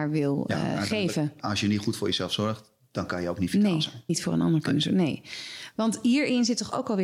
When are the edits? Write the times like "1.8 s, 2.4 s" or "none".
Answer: 4.1 s